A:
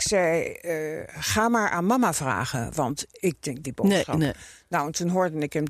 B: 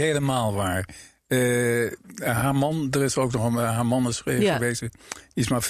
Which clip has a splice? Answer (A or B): A